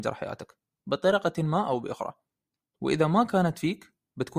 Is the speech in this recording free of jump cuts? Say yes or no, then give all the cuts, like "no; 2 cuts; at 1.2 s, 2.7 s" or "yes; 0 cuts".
yes; 0 cuts